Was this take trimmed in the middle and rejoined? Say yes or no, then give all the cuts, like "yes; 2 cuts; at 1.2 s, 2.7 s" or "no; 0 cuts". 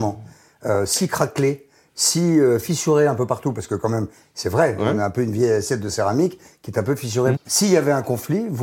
yes; 1 cut; at 7.4 s